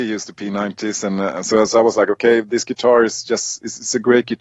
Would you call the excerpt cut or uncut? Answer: uncut